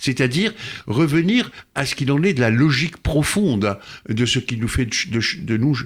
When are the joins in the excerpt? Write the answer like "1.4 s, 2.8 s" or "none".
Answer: none